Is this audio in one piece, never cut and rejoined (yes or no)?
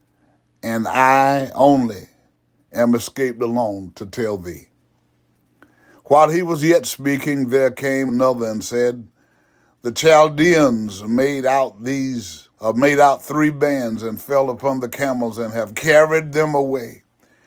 no